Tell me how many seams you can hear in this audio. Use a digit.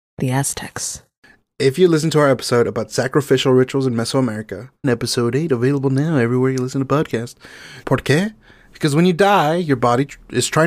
2